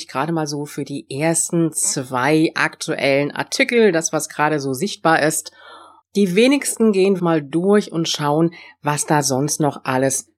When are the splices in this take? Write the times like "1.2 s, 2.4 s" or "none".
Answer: 6.0 s, 7.2 s